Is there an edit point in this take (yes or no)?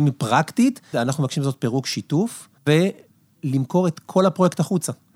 yes